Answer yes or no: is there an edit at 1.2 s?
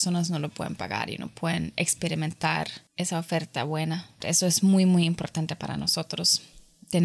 no